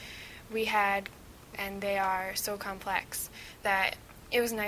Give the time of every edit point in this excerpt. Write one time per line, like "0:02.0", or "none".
0:01.5